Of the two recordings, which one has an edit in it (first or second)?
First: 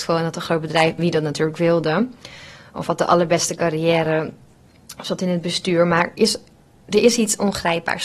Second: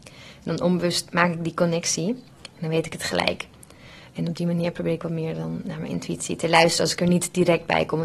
first